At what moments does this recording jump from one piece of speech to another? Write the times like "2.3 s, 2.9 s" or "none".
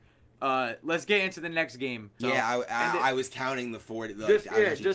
2.2 s